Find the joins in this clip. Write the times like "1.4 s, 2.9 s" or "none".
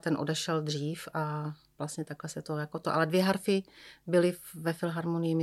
none

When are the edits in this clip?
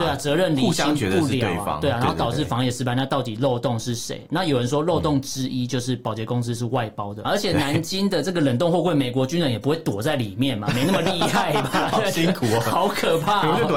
7.2 s

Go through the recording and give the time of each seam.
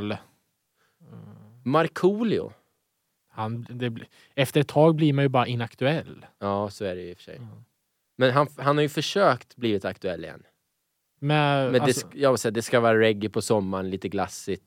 3.2 s

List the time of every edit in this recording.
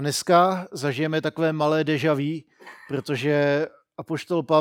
none

